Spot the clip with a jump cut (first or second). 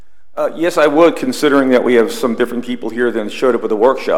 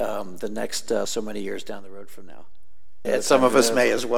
second